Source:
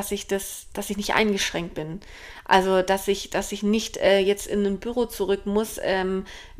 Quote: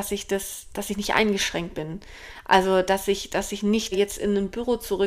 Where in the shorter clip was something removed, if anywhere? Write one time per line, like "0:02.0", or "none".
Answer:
0:03.9